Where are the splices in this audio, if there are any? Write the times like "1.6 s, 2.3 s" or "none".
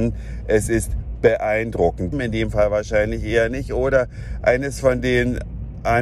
2.1 s

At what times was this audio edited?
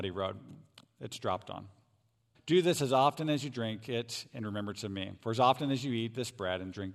2.3 s

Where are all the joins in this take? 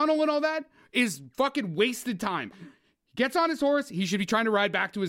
2.5 s

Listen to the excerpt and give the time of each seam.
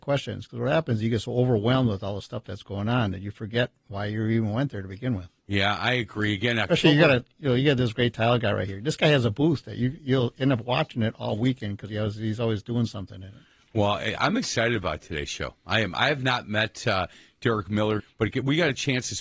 18.0 s

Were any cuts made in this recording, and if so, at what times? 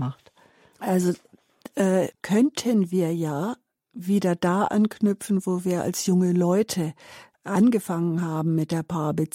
2.1 s

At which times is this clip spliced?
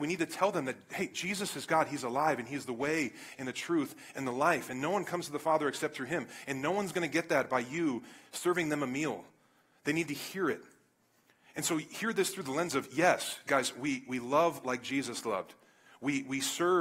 none

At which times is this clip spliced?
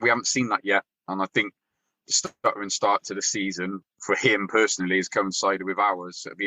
none

